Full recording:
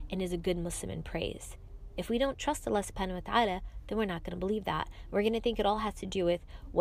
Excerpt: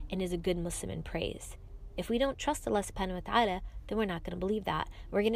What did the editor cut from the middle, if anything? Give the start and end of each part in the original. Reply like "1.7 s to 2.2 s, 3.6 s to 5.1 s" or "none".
none